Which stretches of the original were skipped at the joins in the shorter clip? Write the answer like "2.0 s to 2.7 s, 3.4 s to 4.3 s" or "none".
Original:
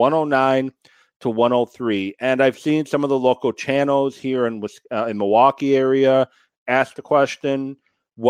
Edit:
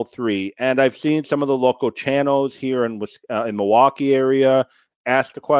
none

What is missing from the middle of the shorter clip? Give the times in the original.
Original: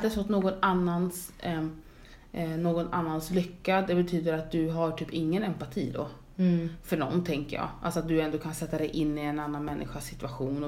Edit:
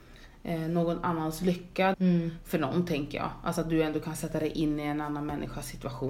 3.8 s to 6.3 s

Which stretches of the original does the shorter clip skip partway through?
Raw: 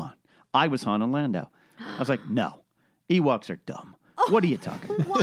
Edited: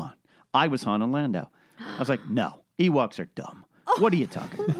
2.7 s to 3.0 s

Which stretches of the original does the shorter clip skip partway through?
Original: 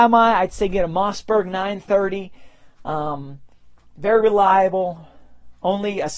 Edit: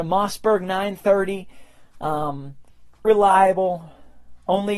3.9 s to 4.2 s

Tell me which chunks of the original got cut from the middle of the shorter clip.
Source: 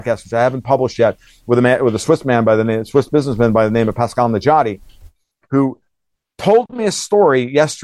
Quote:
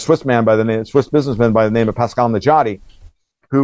none

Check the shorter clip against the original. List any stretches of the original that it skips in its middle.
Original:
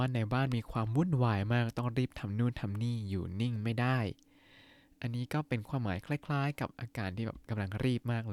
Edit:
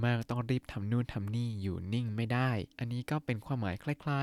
4.2 s to 5.0 s

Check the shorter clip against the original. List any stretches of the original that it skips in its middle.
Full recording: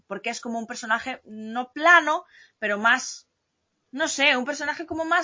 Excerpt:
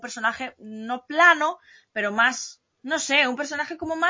3.4 s to 3.8 s

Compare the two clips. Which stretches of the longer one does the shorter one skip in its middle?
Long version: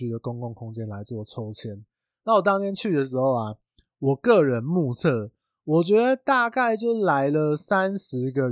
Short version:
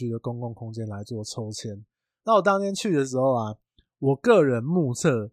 none

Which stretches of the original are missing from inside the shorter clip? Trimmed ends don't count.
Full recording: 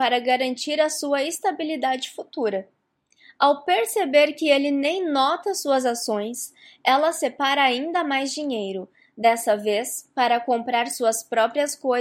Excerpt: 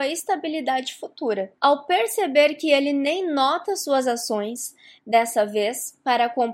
2.7 s to 3.3 s, 6.8 s to 9.1 s

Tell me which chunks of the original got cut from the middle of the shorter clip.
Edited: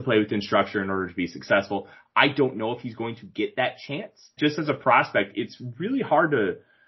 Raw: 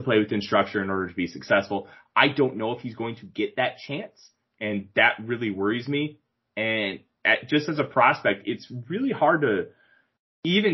4.4 s to 7.5 s

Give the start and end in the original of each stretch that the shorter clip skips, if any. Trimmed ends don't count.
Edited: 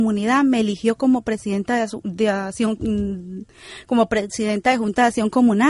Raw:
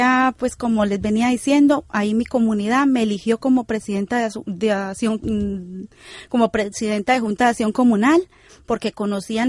none

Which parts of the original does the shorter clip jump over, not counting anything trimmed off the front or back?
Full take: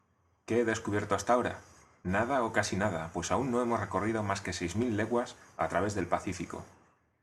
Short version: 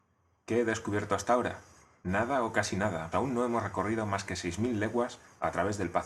3.1 s to 3.3 s

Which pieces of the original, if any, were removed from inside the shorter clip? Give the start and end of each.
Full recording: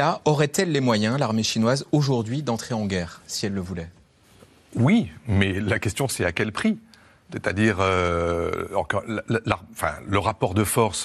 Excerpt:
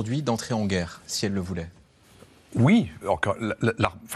5.2 s to 8.7 s

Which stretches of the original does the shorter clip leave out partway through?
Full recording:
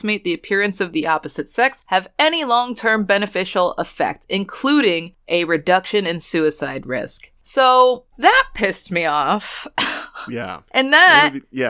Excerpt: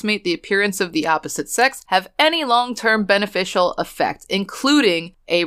none

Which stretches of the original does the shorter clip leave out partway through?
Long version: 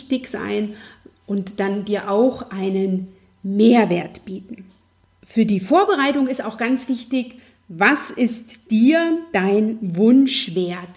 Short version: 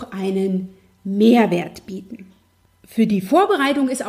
none

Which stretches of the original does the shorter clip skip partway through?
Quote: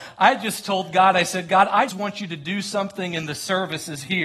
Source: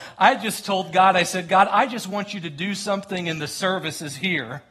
1.9 s to 2.0 s

